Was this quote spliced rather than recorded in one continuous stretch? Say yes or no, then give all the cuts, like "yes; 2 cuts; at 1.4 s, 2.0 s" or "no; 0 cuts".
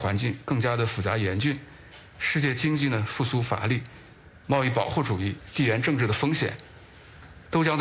yes; 1 cut; at 4.3 s